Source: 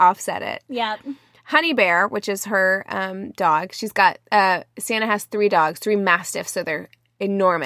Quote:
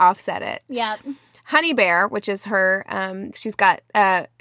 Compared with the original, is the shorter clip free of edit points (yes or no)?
no